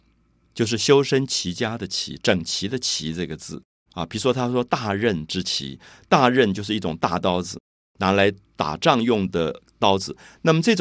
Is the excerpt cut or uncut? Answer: cut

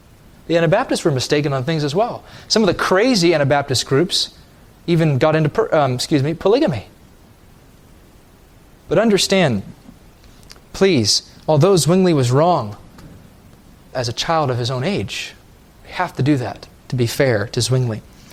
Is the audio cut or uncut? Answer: cut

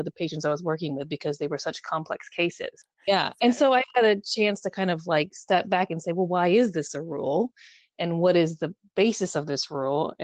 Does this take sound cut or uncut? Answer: uncut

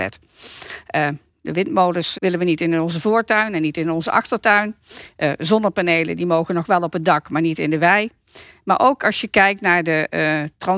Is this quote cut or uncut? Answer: cut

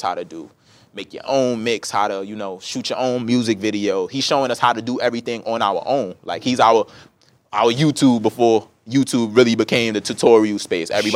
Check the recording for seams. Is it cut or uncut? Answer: uncut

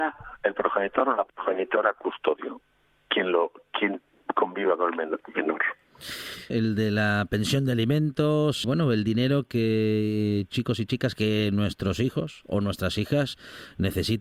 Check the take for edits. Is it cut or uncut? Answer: cut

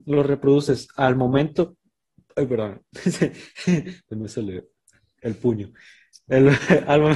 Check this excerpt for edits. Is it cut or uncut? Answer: uncut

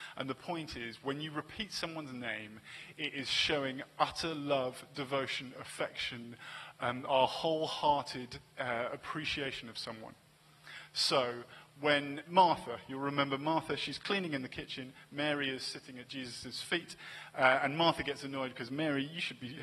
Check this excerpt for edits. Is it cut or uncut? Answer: cut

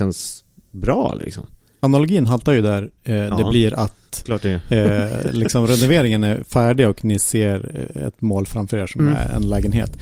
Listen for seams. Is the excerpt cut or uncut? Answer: uncut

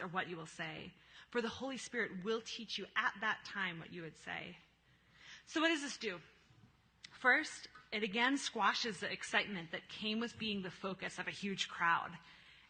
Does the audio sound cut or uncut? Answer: uncut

